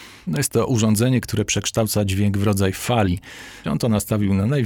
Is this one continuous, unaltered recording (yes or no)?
no